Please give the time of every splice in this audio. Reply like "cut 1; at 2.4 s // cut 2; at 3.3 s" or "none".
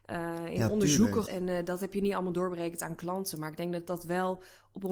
cut 1; at 1.3 s